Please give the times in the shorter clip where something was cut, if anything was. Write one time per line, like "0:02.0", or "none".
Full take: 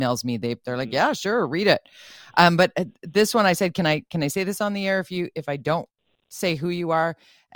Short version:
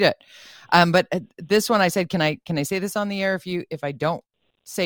none